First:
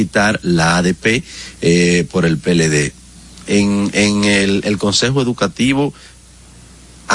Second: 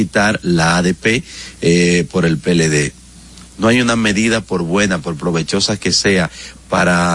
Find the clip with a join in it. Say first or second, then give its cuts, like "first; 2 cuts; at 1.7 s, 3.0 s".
second; 1 cut; at 3.5 s